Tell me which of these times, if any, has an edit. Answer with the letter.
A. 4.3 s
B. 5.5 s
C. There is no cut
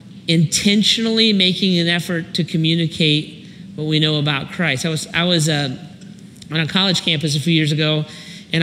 C